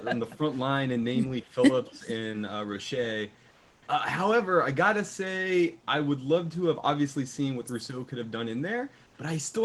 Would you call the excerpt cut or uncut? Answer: uncut